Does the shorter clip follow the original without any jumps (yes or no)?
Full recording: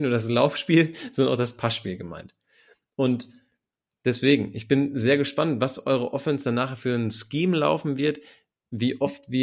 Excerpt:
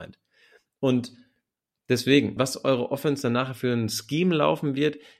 no